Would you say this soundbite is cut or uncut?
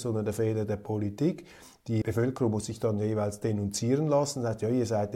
cut